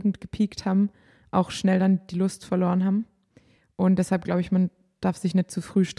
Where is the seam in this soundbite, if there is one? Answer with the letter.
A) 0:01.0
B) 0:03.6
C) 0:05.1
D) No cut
D